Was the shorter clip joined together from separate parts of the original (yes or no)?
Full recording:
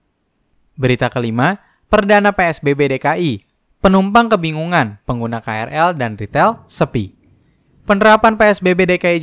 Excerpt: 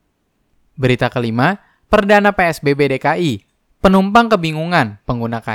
no